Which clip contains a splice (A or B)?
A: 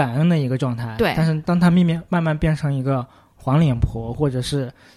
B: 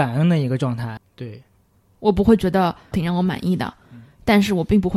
B